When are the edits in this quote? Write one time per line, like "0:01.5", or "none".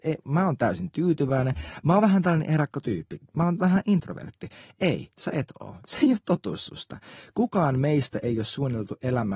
none